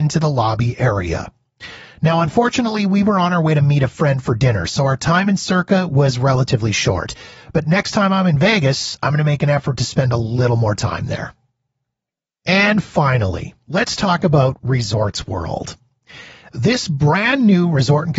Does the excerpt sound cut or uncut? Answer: uncut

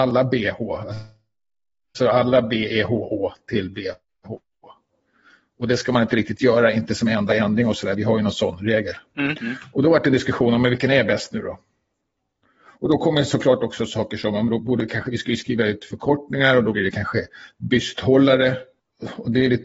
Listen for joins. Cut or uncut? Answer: uncut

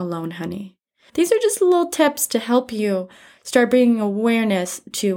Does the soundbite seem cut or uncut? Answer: cut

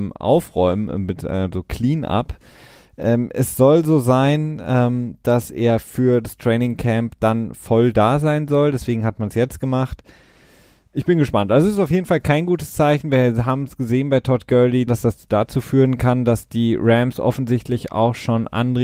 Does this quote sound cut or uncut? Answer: cut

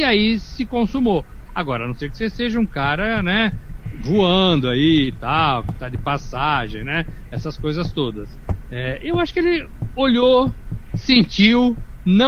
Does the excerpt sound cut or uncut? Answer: cut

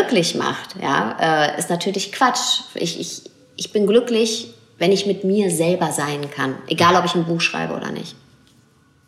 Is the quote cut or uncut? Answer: uncut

